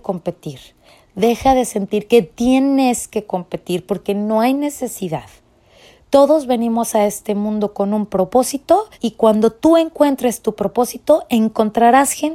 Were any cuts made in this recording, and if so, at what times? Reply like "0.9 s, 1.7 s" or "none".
6.0 s, 8.9 s